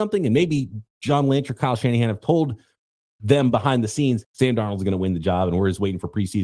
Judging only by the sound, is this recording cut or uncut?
cut